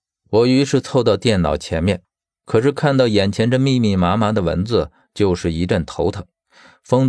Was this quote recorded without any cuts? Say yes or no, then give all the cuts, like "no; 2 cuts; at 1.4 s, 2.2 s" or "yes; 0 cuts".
yes; 0 cuts